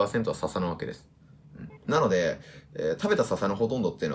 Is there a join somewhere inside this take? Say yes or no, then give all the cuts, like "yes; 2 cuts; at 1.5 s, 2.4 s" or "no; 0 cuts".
yes; 1 cut; at 1.8 s